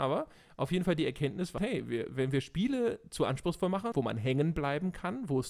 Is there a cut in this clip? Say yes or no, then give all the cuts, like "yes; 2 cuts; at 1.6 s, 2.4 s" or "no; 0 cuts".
yes; 2 cuts; at 1.6 s, 3.9 s